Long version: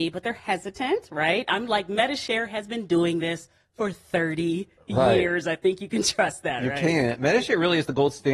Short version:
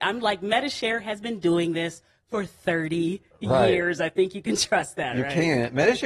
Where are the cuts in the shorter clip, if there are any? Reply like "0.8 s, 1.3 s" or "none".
none